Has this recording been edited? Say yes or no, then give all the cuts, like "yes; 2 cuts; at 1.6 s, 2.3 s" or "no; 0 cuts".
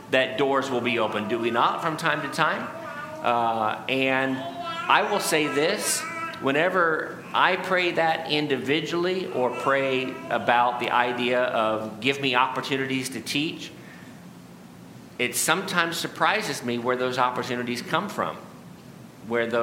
no; 0 cuts